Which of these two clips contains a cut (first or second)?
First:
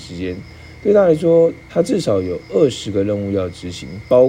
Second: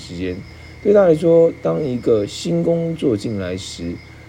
first